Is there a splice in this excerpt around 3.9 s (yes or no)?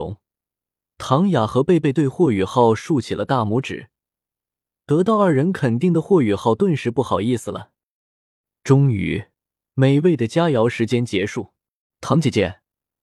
no